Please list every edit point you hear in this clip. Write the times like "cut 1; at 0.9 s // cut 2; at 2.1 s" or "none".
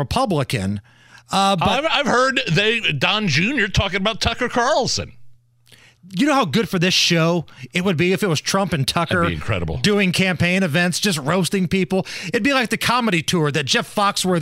none